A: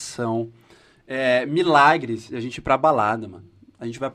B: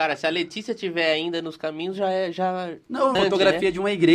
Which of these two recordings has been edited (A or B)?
B